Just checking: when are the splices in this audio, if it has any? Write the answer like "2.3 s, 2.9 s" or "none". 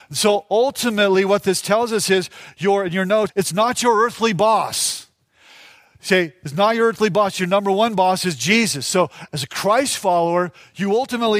3.3 s